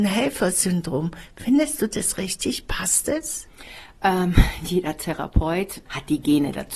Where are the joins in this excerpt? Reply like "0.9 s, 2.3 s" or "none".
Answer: 5.9 s